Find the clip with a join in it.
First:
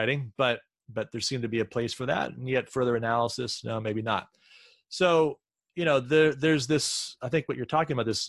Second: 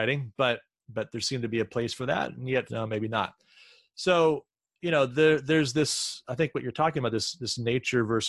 second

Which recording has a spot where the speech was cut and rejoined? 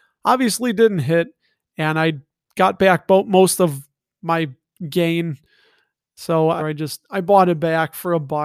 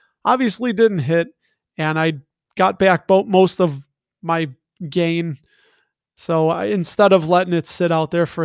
first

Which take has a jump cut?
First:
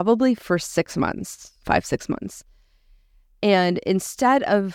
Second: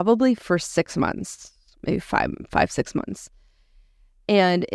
first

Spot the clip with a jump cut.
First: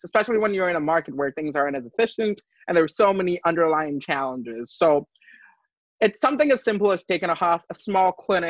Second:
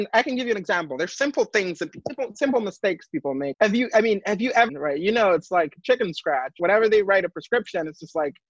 second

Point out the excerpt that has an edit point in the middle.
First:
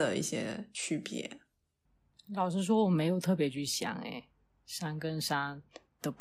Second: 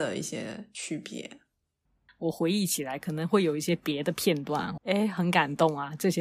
second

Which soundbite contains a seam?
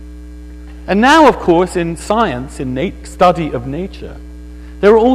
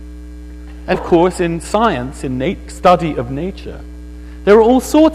second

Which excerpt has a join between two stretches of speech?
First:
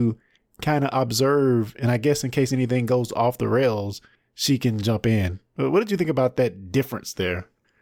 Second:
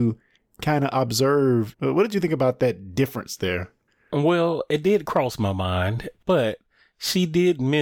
second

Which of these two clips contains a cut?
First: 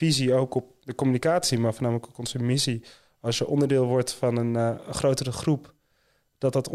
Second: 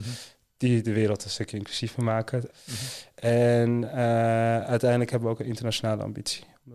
second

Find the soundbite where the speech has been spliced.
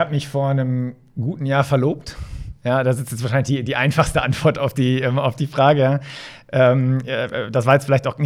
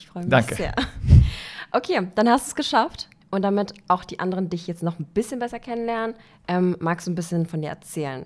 second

